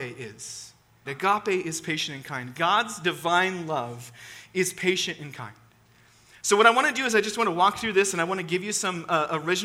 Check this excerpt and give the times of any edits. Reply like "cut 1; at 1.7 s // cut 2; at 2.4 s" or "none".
cut 1; at 1.0 s

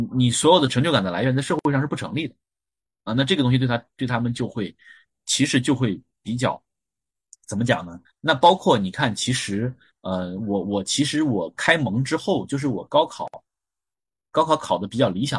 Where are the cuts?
cut 1; at 8.0 s

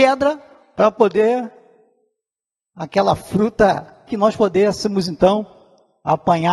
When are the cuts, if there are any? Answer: cut 1; at 4.1 s

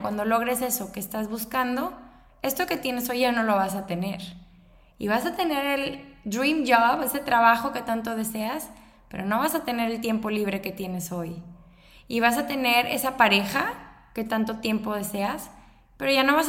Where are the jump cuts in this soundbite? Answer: none

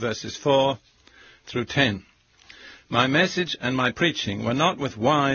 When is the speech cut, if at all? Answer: none

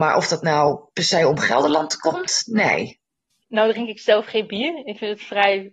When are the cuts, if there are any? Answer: cut 1; at 3.4 s

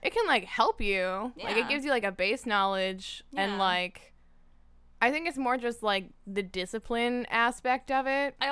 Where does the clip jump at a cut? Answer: none

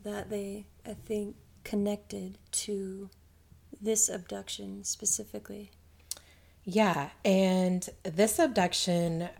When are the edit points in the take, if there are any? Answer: cut 1; at 2.5 s

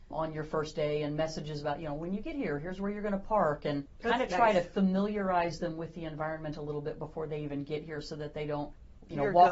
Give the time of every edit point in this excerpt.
none

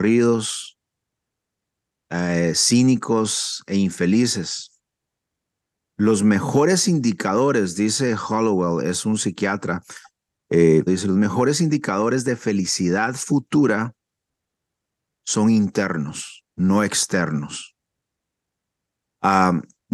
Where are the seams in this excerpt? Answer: cut 1; at 10.9 s // cut 2; at 16.5 s

